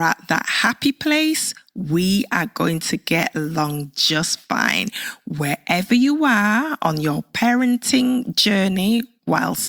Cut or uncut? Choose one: uncut